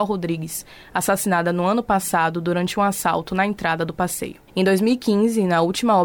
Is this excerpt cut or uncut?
cut